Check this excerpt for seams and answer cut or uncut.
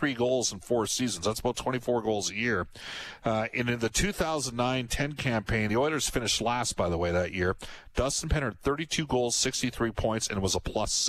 uncut